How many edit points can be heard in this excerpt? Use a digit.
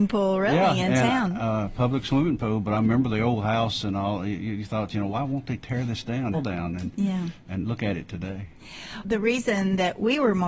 2